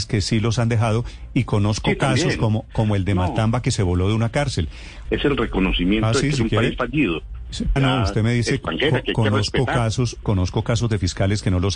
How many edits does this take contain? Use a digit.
3